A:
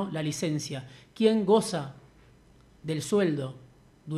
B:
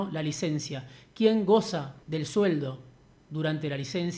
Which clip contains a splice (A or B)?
B